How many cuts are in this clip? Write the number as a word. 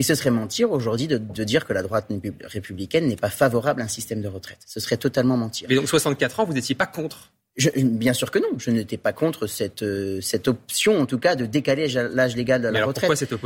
zero